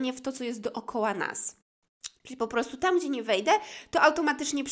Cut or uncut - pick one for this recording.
uncut